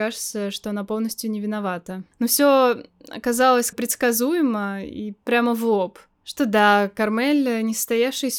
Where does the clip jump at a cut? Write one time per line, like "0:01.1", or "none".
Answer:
0:02.1
0:03.7